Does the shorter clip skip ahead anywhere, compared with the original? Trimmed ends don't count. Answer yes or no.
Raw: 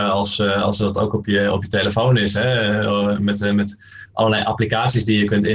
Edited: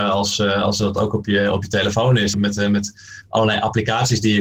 yes